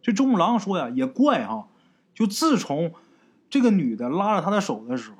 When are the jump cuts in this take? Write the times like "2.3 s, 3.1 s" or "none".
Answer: none